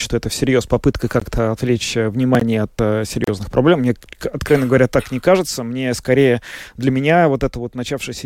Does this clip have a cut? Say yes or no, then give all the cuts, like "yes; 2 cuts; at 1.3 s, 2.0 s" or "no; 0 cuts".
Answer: no; 0 cuts